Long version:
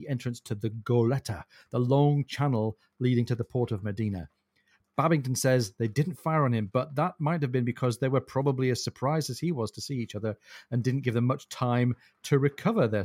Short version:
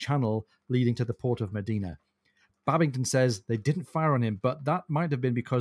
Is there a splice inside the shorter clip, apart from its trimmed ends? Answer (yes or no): no